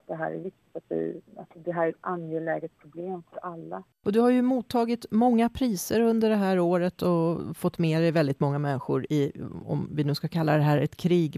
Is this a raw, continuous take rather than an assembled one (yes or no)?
no